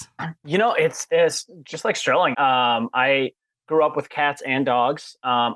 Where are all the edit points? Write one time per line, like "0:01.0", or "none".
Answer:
0:02.3